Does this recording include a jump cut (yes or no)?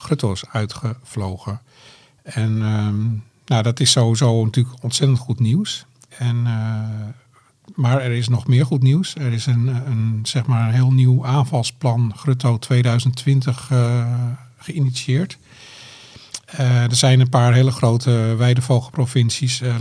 no